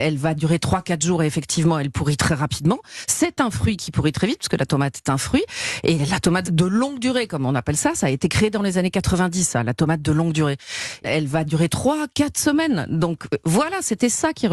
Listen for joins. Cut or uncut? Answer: uncut